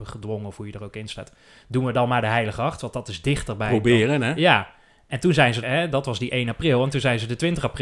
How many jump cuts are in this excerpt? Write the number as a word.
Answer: one